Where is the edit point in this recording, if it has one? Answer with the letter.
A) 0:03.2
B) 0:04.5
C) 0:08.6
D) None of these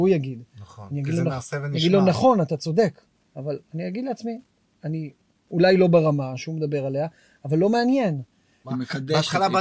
C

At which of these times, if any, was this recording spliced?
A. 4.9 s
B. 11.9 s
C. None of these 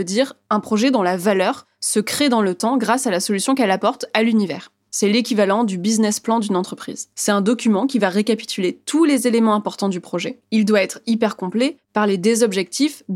A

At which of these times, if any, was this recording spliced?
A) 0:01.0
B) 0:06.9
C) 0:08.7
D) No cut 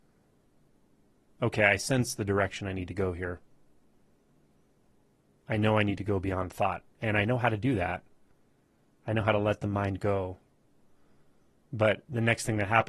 B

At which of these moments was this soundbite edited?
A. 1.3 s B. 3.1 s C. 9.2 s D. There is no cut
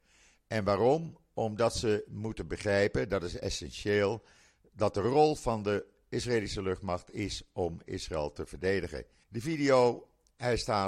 C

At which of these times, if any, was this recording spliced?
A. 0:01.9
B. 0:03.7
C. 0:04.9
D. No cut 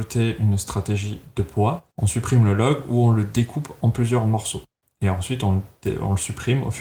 A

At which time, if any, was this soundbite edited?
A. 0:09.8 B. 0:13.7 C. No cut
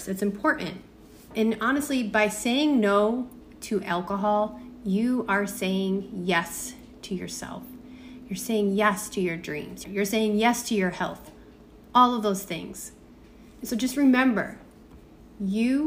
A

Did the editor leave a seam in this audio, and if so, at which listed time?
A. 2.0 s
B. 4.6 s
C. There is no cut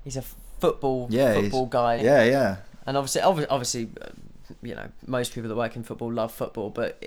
A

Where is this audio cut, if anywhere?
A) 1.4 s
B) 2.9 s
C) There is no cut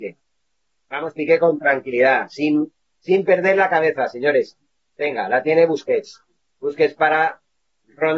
B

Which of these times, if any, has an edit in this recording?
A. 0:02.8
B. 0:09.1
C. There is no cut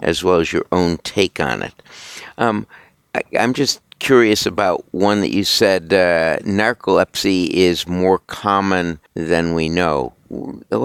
B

